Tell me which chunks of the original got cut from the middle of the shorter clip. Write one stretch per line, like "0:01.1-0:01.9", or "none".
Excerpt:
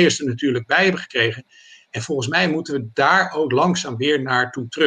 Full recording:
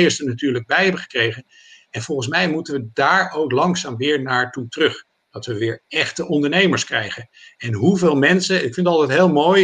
none